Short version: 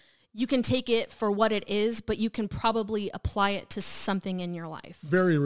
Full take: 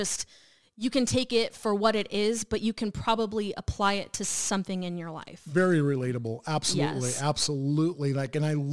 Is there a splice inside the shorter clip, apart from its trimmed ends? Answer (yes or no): no